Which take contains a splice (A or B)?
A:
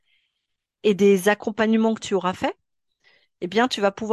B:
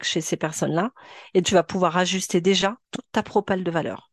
B